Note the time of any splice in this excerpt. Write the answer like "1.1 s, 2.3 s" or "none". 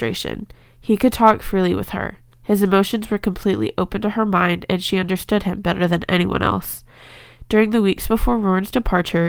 none